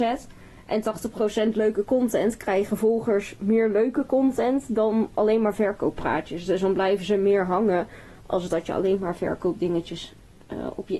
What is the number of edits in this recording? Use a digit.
0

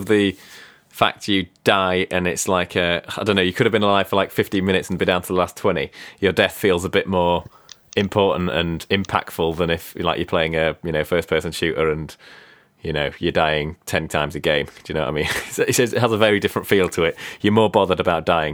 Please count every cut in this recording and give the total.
0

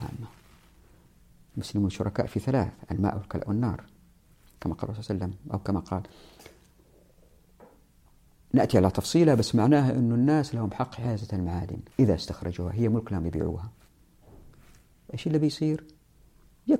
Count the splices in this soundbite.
1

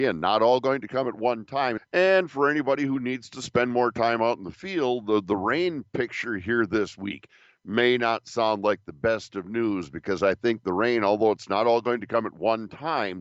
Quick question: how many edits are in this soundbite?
1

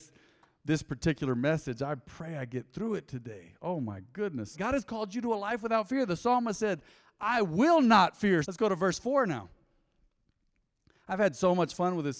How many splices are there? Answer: 2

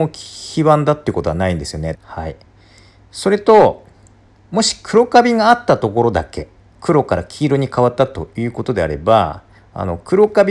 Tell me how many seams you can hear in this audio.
2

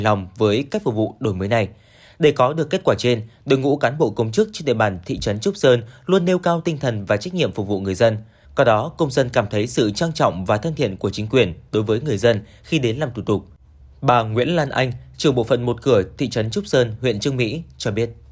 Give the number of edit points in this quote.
1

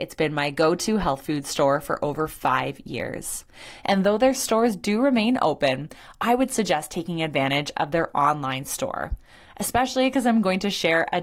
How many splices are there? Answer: 1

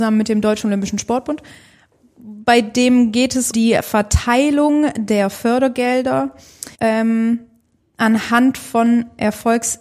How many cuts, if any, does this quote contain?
2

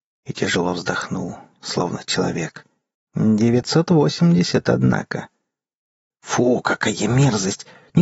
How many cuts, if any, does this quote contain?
2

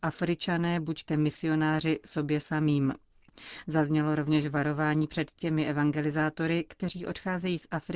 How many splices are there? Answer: 0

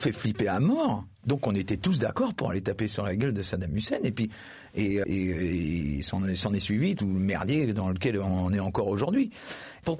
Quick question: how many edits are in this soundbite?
1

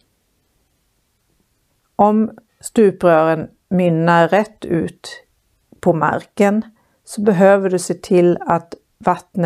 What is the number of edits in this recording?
1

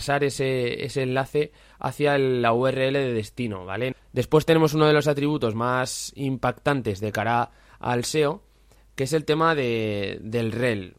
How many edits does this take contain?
1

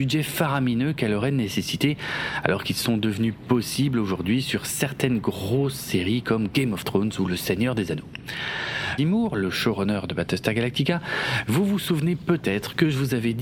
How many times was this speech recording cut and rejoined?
1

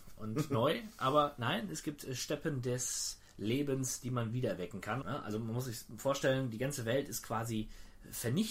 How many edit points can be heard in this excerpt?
1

